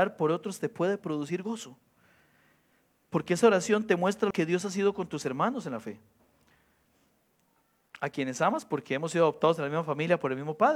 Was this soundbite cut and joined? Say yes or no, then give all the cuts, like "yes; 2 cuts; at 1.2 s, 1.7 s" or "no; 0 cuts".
yes; 1 cut; at 4.3 s